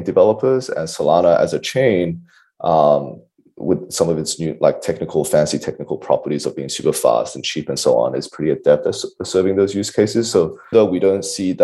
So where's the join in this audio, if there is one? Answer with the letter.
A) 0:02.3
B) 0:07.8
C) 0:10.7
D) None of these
C